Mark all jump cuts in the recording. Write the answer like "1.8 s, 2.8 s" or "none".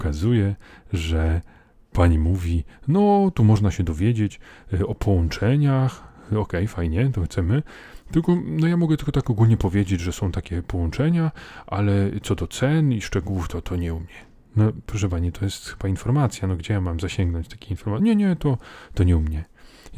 none